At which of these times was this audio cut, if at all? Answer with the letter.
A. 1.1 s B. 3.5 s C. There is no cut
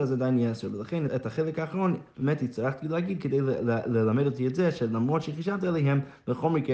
A